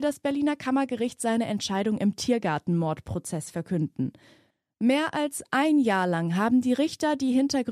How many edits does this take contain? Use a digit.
0